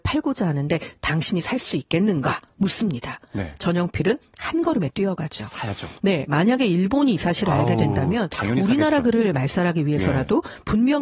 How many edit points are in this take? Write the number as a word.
zero